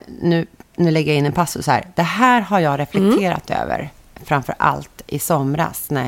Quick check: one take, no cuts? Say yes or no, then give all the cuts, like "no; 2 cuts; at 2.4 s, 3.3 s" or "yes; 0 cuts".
yes; 0 cuts